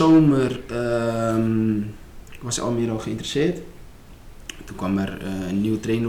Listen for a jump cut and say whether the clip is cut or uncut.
uncut